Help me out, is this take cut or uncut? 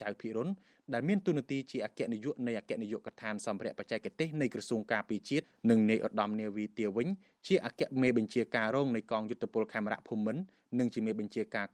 uncut